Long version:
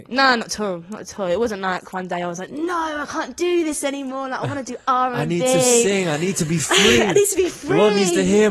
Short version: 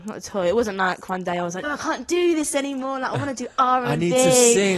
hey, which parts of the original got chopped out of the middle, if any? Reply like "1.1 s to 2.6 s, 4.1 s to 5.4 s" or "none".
2.5 s to 2.9 s